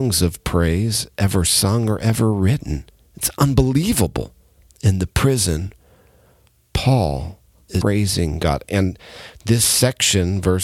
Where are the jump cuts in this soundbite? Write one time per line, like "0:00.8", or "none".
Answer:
0:04.7
0:07.8